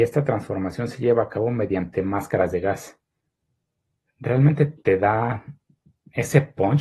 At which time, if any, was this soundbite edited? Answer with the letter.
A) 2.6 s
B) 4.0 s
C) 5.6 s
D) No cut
B